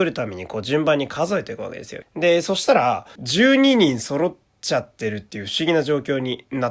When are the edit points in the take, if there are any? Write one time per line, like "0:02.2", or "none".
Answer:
0:02.0
0:03.2